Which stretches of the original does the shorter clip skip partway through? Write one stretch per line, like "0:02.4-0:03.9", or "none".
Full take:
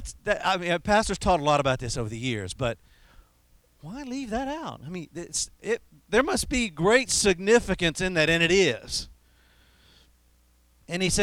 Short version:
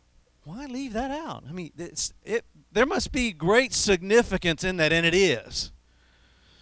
none